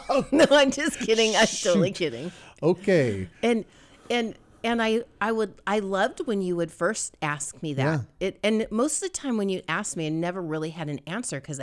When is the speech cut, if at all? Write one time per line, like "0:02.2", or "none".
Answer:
none